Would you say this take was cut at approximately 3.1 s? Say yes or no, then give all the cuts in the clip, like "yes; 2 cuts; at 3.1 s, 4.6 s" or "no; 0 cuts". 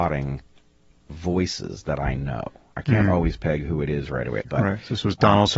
no; 1 cut; at 4.4 s